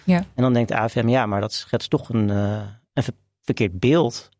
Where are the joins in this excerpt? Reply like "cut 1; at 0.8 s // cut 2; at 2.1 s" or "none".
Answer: none